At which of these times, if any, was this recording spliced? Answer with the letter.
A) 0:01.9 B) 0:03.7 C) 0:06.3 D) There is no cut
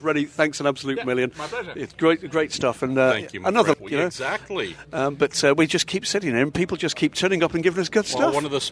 B